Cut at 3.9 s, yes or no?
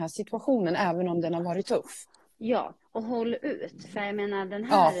no